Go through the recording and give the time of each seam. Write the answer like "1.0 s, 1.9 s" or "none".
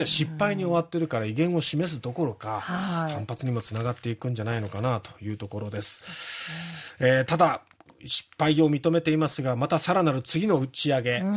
none